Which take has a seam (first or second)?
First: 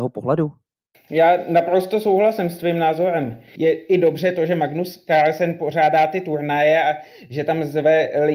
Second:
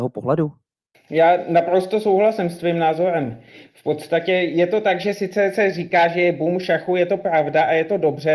first